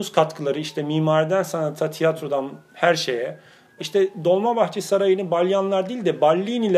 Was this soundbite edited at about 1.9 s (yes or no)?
no